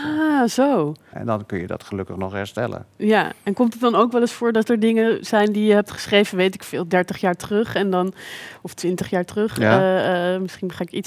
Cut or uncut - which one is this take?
cut